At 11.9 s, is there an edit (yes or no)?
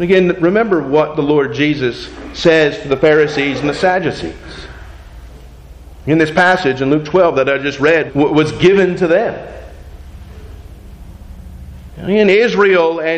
yes